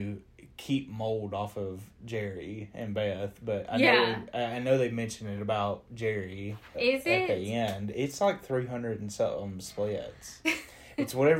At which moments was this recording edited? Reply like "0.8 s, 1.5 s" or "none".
6.7 s, 10.4 s